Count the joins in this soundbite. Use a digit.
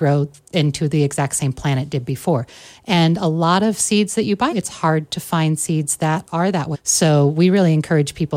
2